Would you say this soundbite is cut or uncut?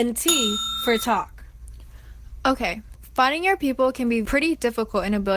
cut